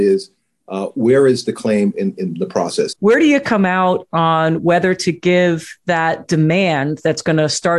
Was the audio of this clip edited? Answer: yes; 1 cut; at 2.9 s

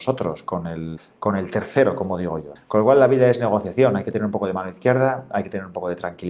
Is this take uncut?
no; 1 cut; at 2.6 s

